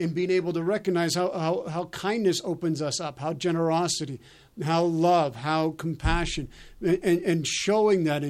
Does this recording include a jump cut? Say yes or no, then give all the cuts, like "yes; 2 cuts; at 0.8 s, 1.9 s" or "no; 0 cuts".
no; 0 cuts